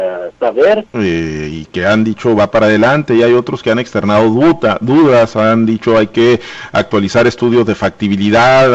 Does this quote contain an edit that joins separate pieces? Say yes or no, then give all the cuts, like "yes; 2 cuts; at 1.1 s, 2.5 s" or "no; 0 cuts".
yes; 1 cut; at 0.9 s